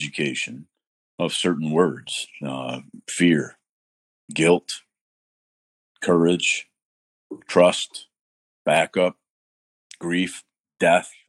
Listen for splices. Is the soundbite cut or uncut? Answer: uncut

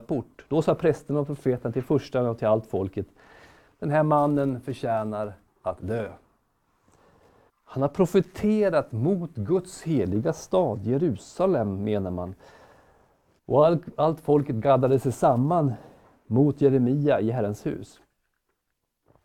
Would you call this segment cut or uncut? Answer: cut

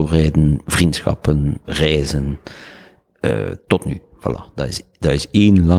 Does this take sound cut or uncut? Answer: cut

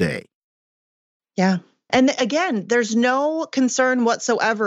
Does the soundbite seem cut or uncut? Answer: cut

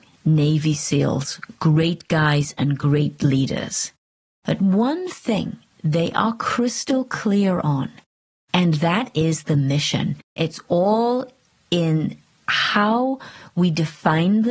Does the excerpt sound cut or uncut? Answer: cut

